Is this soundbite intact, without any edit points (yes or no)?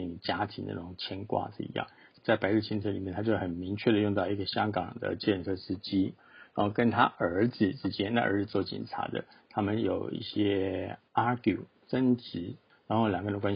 no